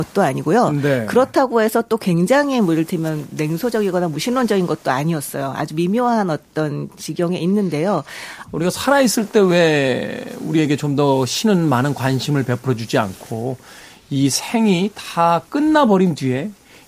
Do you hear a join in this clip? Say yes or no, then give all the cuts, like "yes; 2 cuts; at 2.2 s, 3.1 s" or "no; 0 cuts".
yes; 1 cut; at 8.4 s